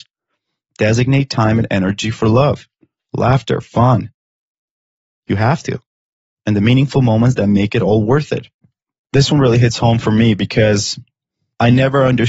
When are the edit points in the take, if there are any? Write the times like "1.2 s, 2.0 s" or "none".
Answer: none